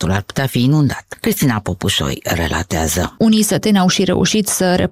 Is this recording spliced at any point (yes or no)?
yes